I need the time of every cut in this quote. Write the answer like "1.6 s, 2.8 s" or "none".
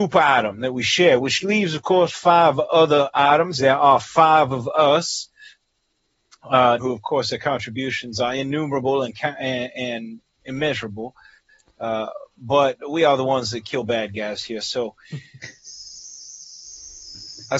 6.8 s